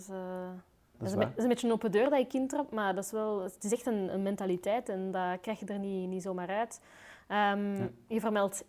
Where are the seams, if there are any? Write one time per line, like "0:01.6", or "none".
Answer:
0:00.9